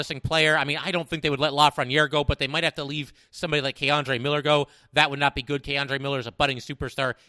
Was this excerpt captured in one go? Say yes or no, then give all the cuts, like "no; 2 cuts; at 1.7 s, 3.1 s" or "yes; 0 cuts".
yes; 0 cuts